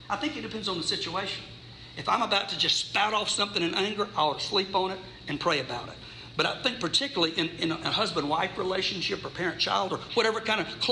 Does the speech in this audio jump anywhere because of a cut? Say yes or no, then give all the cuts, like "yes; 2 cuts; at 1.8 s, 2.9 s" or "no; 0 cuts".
no; 0 cuts